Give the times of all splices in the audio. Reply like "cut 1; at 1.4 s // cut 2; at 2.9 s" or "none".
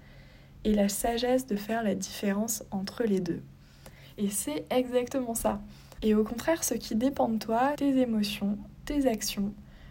cut 1; at 6.0 s // cut 2; at 7.7 s